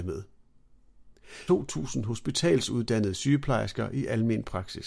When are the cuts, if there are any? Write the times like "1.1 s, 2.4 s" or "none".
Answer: 1.5 s